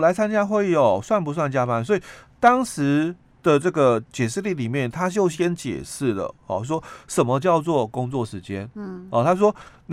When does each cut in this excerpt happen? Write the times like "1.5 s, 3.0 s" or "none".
none